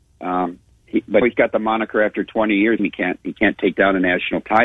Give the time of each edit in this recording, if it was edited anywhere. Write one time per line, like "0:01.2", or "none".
0:01.2
0:02.8